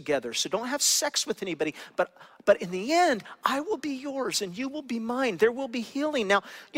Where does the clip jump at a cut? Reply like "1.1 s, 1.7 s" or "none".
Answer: none